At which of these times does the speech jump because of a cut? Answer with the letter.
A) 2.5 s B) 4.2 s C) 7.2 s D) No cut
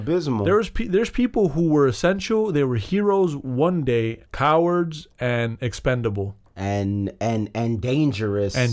B